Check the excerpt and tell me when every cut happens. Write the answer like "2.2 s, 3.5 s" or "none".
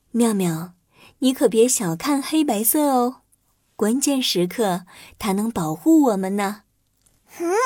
none